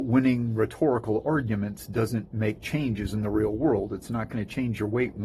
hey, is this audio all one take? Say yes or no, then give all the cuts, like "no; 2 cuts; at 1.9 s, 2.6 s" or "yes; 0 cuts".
yes; 0 cuts